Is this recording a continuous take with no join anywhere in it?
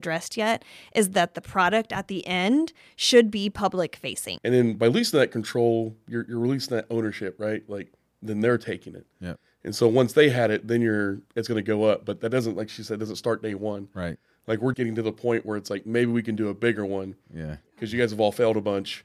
no; 3 cuts; at 4.4 s, 11.3 s, 14.7 s

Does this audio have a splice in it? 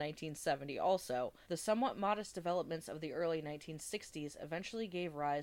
yes; 1 cut; at 1.4 s

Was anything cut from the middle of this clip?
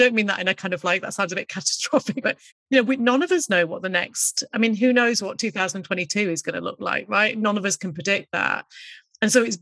yes; 1 cut; at 2.2 s

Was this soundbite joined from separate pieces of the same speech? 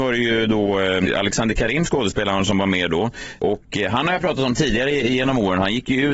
no; 0 cuts

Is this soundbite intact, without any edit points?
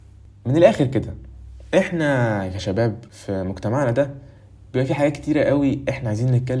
no; 1 cut; at 3.1 s

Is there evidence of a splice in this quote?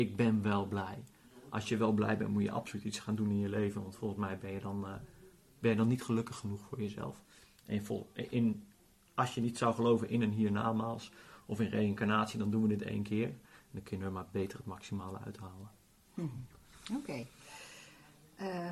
no; 0 cuts

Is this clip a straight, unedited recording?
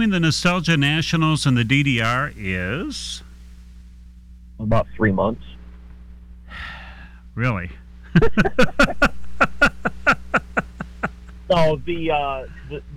yes; 0 cuts

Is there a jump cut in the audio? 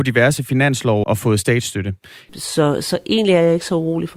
yes; 2 cuts; at 1.0 s, 2.3 s

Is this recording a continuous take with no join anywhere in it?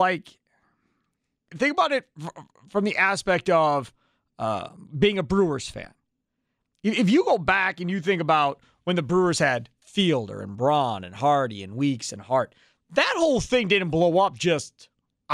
no; 1 cut; at 1.5 s

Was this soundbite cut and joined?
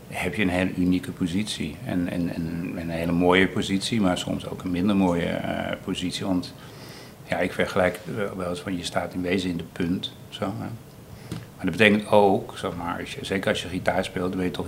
no; 0 cuts

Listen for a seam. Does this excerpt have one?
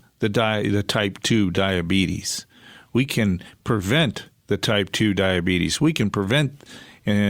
no; 0 cuts

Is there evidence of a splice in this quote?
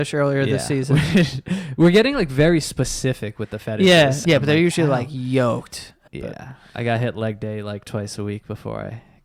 yes; 2 cuts; at 4.2 s, 6.1 s

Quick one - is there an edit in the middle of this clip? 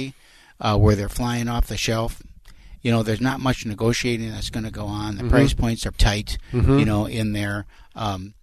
yes; 1 cut; at 5.9 s

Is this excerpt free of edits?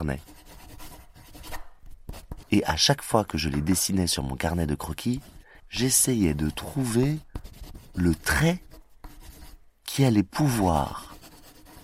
no; 2 cuts; at 2.4 s, 5.6 s

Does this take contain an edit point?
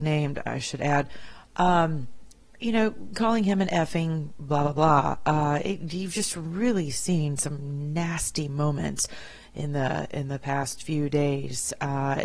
no; 0 cuts

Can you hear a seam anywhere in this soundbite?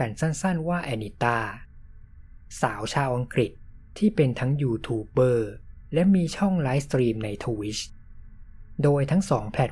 no; 0 cuts

